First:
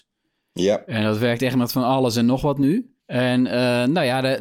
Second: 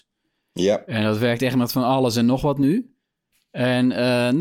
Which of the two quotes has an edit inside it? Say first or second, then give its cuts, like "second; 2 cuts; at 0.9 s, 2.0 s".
first; 1 cut; at 3.0 s